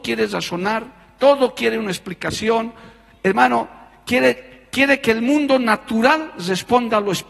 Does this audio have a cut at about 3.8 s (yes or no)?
no